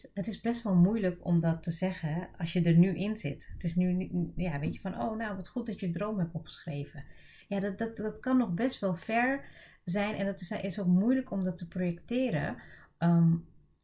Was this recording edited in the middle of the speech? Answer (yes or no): no